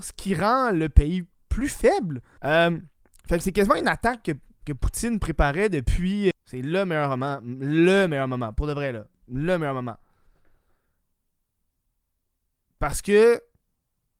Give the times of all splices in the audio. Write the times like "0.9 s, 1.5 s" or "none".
2.4 s, 6.3 s

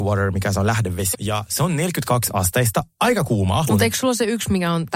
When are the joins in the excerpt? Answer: 1.1 s, 3.7 s

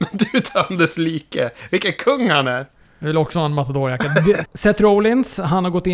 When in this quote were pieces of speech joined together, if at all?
4.4 s

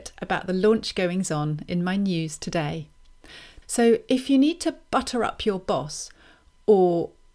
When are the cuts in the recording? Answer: 3.6 s

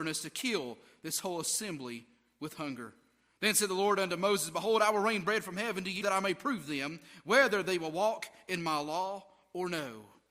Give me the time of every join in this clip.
6.0 s

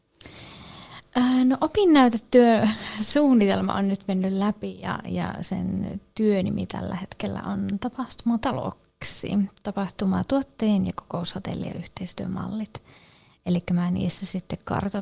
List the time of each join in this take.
none

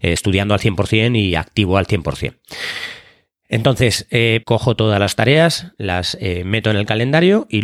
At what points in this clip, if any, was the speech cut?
4.4 s

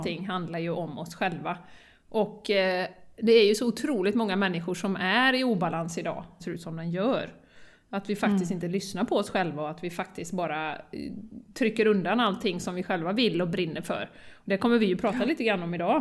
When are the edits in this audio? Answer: 6.4 s

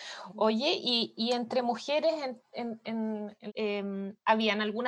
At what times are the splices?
3.5 s

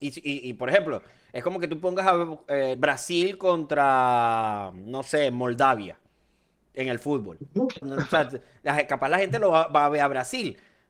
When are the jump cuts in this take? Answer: 2.7 s, 7.8 s

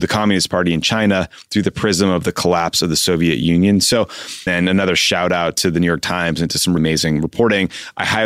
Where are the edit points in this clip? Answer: 4.5 s, 6.8 s

